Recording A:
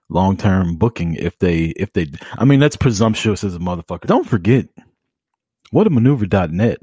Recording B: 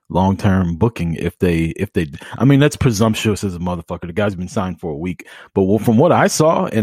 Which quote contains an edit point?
A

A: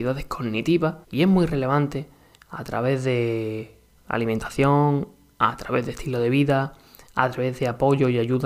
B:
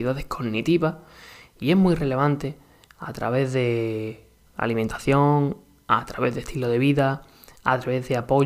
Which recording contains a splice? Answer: A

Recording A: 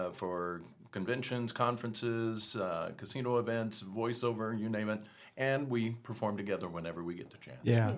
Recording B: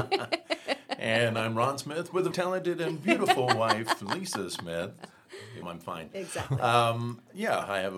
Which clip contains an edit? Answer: B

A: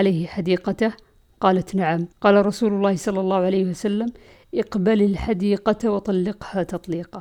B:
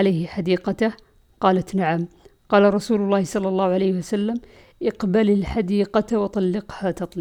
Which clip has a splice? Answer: A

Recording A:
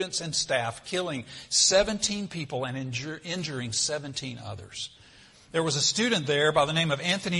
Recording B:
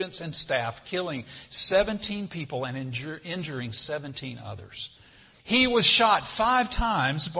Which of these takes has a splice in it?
B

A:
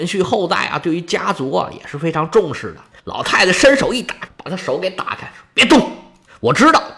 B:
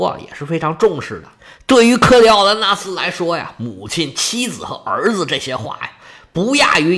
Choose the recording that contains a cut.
A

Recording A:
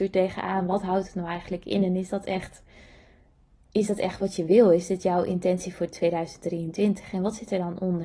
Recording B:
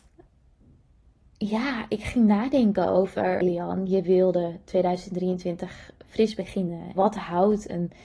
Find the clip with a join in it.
B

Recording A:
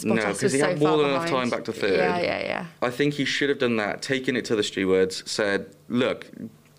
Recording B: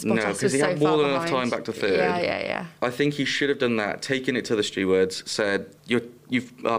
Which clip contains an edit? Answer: B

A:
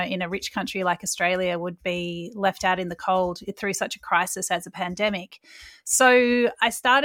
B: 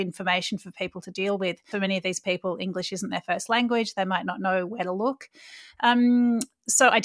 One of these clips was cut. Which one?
B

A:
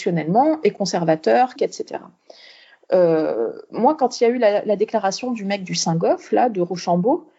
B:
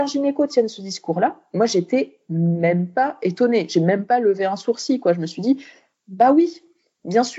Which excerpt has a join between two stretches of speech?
A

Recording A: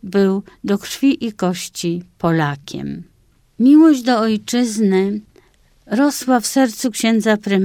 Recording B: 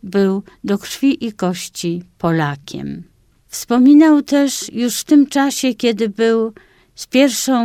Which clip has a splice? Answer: B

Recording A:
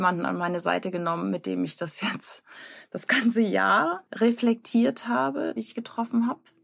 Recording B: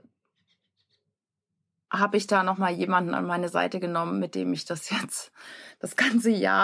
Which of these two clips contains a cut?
A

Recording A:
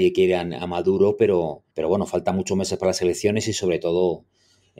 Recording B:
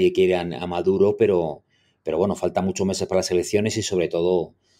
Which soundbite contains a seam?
A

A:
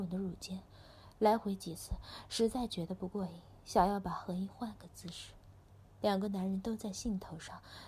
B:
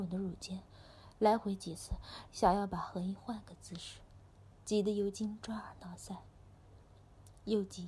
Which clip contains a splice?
B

